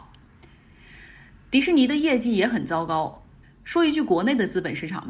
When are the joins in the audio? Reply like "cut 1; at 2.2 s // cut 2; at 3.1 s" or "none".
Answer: cut 1; at 3.4 s